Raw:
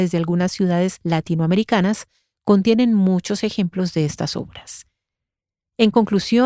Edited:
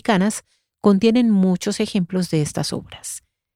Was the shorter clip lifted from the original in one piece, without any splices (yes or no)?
yes